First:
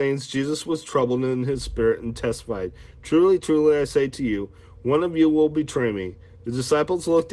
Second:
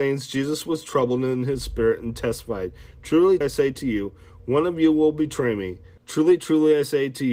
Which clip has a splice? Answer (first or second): second